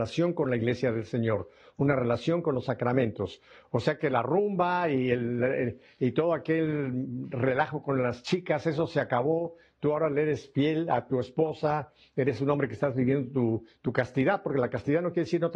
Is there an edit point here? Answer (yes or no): no